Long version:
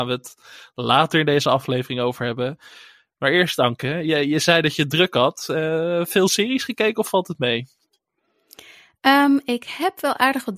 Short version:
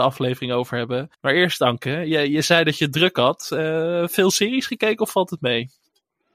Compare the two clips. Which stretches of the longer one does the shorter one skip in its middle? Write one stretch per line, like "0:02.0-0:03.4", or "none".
0:02.6-0:03.1